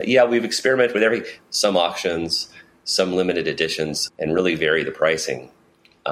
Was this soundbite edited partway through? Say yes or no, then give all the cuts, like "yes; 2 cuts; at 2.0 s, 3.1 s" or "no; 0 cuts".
yes; 2 cuts; at 1.4 s, 4.1 s